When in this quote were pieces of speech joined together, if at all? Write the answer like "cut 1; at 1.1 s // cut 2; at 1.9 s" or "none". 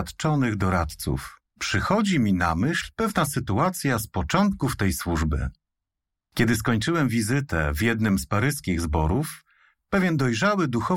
cut 1; at 1.5 s